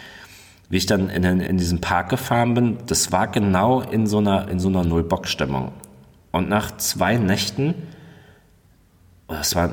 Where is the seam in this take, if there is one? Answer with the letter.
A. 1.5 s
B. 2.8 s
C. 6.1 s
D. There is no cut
A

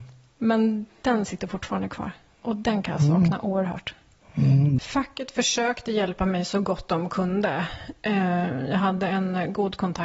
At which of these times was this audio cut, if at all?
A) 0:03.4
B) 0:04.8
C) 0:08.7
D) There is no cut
B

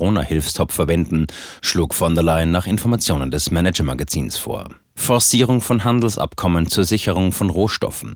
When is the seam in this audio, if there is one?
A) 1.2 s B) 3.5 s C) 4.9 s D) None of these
C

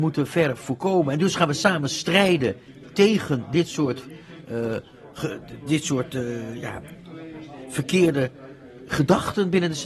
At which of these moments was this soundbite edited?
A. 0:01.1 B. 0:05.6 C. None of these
B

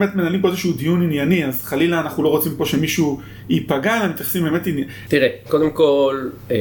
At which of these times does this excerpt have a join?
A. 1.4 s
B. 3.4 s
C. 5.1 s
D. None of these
C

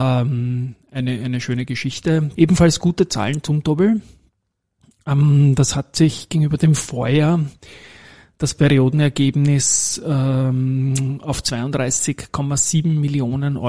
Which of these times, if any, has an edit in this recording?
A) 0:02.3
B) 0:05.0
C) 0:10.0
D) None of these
A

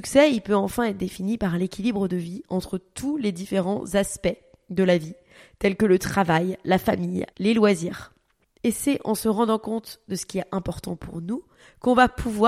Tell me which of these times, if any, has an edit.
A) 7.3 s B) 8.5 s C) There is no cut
A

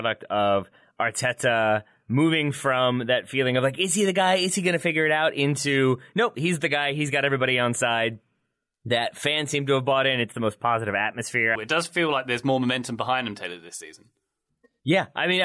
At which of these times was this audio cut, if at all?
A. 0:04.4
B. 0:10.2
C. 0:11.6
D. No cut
C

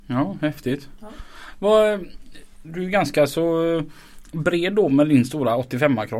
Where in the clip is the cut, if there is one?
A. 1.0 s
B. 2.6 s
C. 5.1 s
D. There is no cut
B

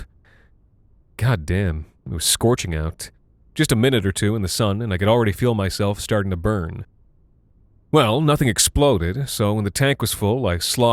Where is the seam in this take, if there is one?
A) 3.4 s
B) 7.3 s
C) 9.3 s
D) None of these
D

